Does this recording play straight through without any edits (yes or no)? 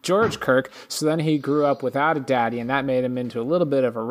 yes